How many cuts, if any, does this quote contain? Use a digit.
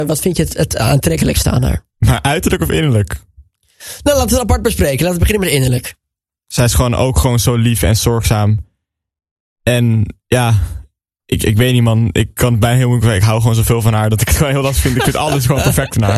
0